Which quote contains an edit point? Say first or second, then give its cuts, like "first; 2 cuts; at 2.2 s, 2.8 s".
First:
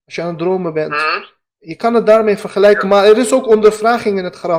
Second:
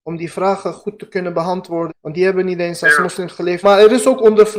second; 2 cuts; at 1.9 s, 3.6 s